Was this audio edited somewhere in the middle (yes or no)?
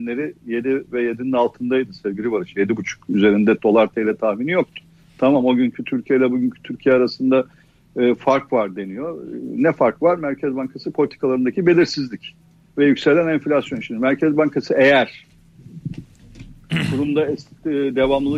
no